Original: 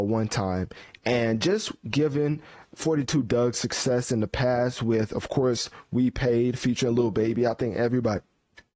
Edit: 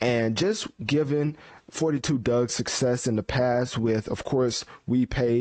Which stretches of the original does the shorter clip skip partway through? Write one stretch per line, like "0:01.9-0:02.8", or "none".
none